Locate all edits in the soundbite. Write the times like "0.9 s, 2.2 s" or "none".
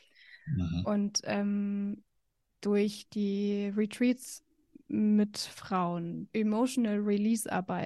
6.3 s